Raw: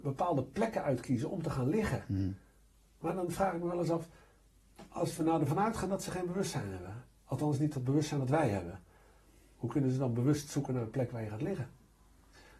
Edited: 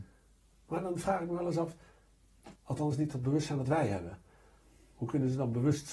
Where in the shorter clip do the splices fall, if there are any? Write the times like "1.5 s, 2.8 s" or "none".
2.6 s